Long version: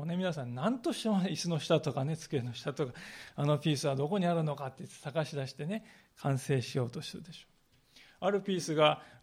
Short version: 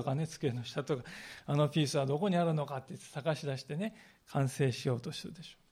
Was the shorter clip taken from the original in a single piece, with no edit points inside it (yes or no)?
yes